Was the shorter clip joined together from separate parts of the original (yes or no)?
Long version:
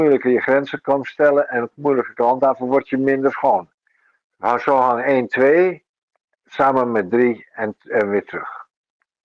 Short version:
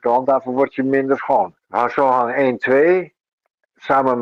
yes